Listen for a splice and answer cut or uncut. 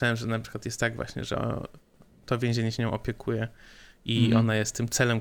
uncut